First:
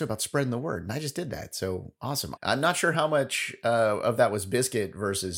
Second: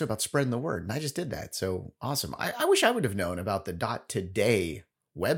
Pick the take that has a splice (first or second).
first